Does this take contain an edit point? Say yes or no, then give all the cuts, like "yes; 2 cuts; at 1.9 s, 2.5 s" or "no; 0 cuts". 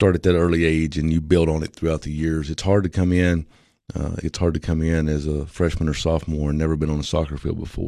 yes; 1 cut; at 4.2 s